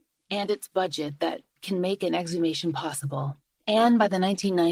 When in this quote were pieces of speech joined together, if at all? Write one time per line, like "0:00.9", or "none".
0:03.6